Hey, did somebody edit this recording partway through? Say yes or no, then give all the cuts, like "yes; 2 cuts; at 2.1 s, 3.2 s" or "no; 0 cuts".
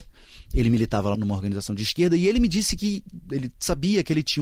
yes; 2 cuts; at 1.1 s, 3.2 s